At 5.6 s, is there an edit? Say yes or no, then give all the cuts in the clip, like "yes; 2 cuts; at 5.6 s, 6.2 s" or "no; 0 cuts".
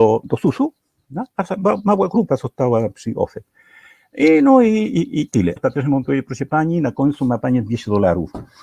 yes; 1 cut; at 5.6 s